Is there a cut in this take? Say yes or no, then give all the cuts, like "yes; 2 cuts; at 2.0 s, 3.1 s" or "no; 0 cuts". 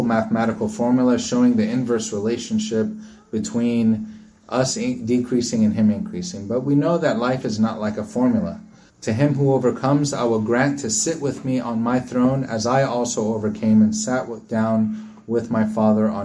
yes; 1 cut; at 8.9 s